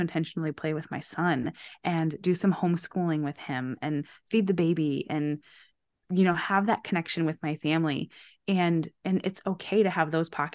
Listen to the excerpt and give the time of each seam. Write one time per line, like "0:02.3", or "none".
none